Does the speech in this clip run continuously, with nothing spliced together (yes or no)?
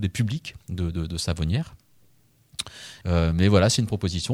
no